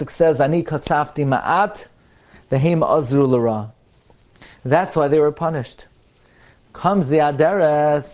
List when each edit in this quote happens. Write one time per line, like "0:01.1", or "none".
none